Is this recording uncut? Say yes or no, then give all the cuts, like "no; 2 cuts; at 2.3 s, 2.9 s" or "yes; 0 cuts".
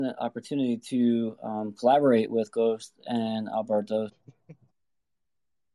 no; 1 cut; at 4.1 s